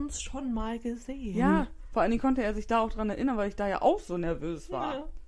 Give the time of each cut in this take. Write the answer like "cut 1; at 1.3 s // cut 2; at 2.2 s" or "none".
none